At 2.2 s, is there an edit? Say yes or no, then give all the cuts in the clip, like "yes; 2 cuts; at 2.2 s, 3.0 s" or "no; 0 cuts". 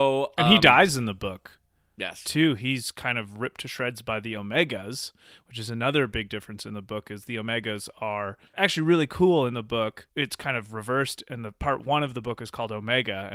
no; 1 cut; at 8.5 s